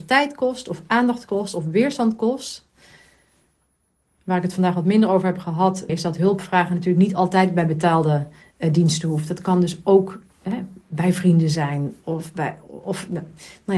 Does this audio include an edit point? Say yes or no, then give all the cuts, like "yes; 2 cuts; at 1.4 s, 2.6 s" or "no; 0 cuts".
yes; 1 cut; at 5.9 s